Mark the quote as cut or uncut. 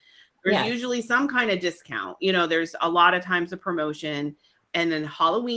uncut